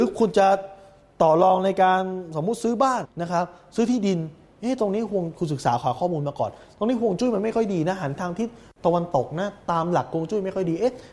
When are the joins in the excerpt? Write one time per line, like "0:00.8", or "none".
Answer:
0:03.0